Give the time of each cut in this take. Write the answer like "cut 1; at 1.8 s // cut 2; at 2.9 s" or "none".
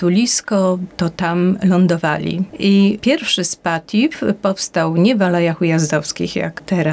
cut 1; at 2.5 s

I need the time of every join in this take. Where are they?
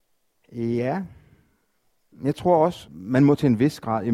cut 1; at 2.9 s

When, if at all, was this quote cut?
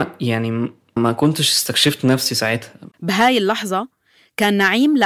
cut 1; at 1.0 s // cut 2; at 2.9 s

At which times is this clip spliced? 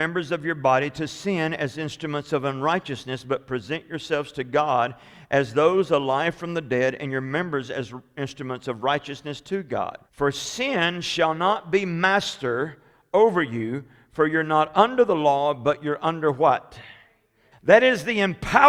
cut 1; at 10.1 s // cut 2; at 17.5 s

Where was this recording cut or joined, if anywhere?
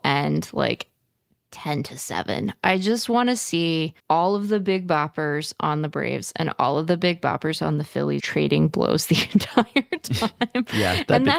cut 1; at 4.0 s // cut 2; at 8.2 s

